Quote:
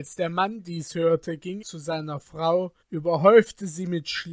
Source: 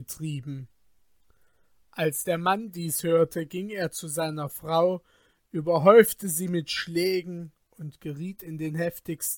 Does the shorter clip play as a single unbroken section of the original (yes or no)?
no